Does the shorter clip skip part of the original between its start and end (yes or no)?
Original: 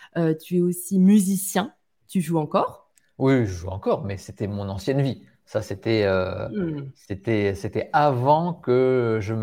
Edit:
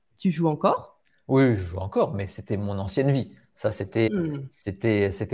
yes